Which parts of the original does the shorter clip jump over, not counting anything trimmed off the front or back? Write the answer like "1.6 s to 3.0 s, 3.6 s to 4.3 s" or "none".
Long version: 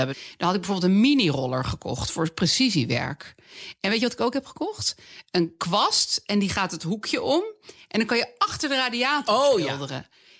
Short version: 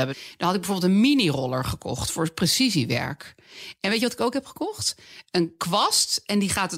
none